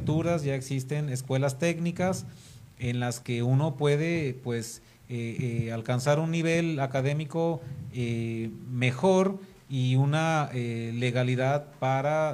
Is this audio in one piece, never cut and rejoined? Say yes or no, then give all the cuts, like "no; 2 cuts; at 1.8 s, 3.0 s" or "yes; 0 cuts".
yes; 0 cuts